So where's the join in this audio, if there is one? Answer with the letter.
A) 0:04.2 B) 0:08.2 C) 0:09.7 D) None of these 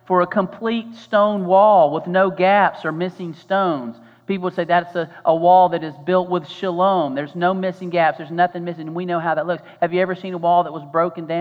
D